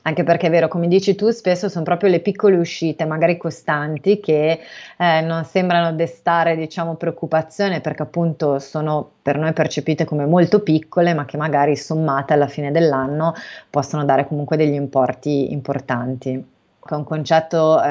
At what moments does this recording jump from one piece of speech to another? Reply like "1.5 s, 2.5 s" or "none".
16.9 s